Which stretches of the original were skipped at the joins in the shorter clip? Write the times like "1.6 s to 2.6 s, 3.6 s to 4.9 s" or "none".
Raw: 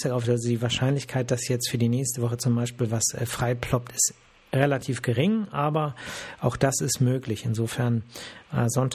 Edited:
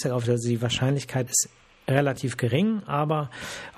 1.3 s to 3.9 s